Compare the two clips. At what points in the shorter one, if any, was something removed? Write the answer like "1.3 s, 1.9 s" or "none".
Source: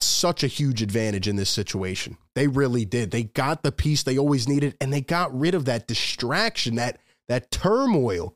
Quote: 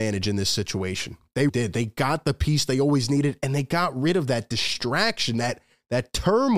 1.5 s